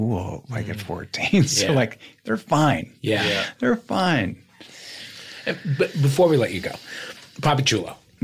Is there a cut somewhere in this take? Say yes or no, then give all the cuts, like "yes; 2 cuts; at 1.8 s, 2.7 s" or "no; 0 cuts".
no; 0 cuts